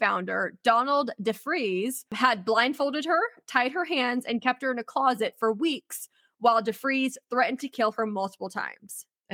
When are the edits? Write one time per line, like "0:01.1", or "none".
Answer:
none